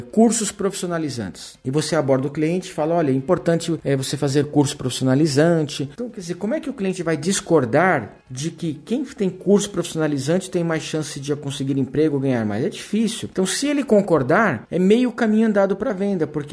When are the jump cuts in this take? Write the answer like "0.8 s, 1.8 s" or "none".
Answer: 5.9 s

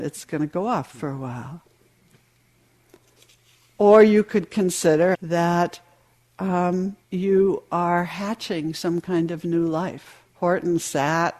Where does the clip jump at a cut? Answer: 5.1 s, 7.0 s, 10.2 s

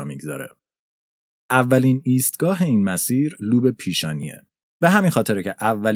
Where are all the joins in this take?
4.7 s

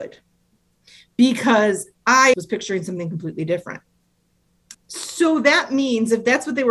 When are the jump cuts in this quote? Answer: 2.3 s, 4.7 s

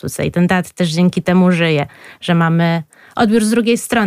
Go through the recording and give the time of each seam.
none

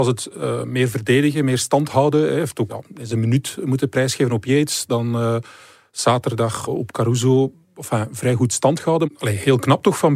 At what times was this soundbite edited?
2.7 s

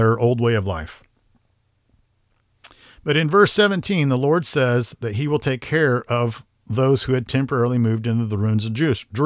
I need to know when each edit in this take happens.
none

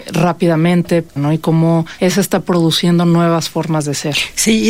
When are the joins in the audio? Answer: 1.2 s

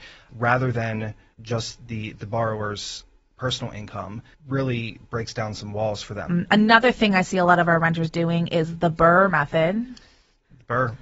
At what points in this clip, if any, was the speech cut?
6.3 s

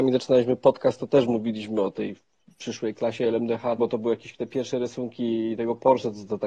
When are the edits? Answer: 3.8 s

